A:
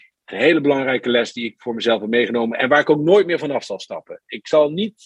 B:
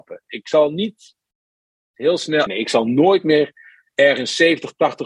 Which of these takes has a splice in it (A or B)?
B